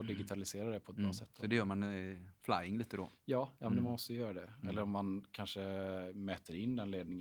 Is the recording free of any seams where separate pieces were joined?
yes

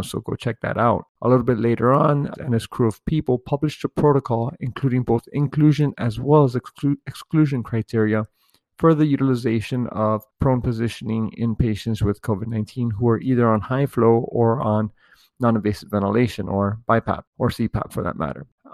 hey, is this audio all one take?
no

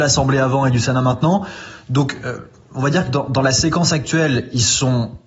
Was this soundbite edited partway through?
no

